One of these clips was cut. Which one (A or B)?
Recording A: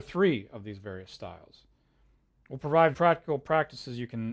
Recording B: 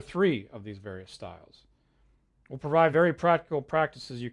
A